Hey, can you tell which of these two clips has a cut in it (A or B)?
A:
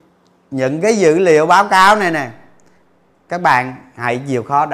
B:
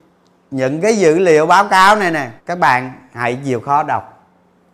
B